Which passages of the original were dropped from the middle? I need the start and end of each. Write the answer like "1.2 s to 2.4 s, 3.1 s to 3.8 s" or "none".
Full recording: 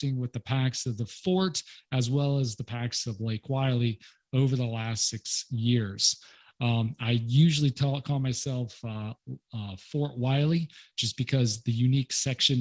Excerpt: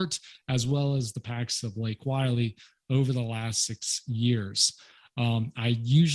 none